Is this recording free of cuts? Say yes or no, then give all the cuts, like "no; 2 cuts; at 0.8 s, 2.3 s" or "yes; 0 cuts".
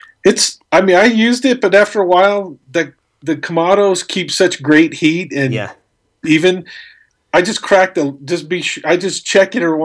yes; 0 cuts